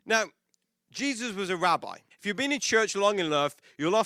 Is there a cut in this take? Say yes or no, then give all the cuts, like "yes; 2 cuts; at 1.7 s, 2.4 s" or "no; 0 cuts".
yes; 1 cut; at 2.1 s